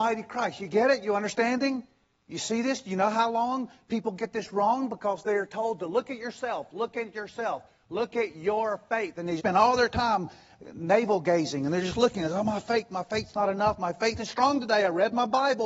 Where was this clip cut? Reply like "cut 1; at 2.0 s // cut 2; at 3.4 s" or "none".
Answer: cut 1; at 9.4 s